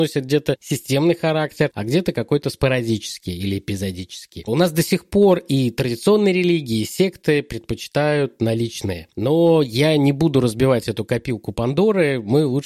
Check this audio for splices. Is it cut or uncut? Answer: uncut